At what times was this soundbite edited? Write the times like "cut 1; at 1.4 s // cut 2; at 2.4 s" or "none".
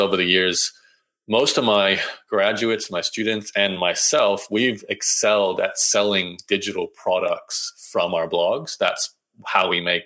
none